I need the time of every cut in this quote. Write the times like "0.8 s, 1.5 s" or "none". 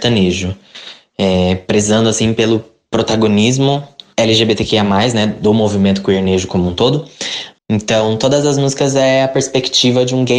7.6 s